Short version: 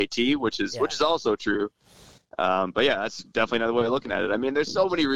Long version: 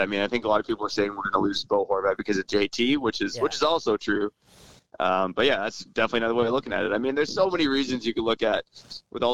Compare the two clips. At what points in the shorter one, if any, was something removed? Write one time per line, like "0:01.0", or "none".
none